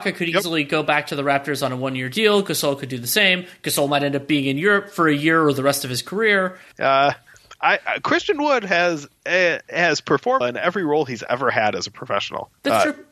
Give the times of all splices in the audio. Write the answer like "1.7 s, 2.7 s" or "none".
6.7 s, 10.4 s